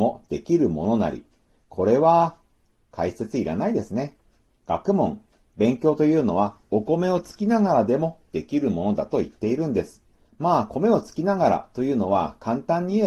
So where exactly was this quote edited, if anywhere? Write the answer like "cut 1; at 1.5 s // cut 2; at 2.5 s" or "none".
cut 1; at 10.3 s